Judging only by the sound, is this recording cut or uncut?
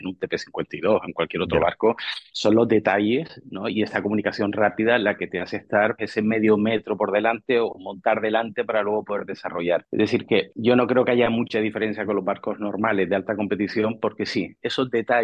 cut